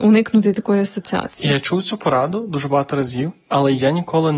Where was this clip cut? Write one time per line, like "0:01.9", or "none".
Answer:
none